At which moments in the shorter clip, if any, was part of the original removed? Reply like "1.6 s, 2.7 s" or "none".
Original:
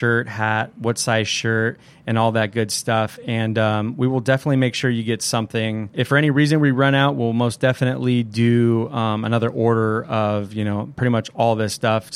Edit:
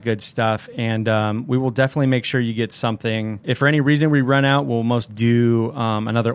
5.1 s